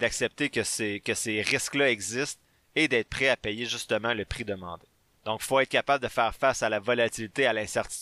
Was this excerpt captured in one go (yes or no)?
yes